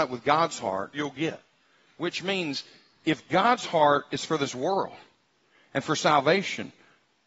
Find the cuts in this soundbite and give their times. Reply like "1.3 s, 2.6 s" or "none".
0.9 s